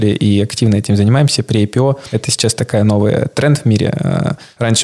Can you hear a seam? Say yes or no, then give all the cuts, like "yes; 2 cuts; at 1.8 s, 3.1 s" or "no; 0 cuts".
no; 0 cuts